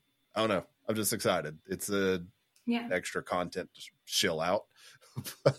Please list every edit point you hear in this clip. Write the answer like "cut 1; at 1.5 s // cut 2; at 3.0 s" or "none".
cut 1; at 2.9 s